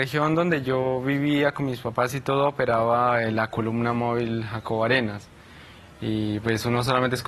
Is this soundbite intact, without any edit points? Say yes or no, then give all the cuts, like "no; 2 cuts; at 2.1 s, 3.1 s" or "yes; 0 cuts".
yes; 0 cuts